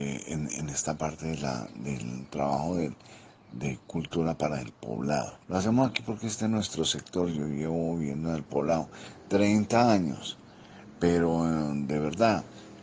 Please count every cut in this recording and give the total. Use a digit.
1